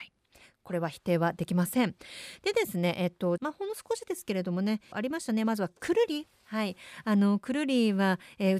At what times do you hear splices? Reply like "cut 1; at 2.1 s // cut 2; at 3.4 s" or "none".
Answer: cut 1; at 3.4 s // cut 2; at 4.9 s